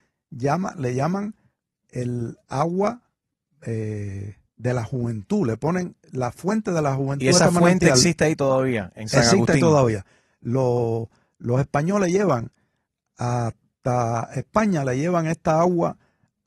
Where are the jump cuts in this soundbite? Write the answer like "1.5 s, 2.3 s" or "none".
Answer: none